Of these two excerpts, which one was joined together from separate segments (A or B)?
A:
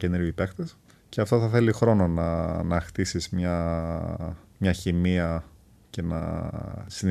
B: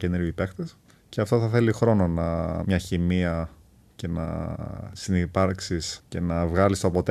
B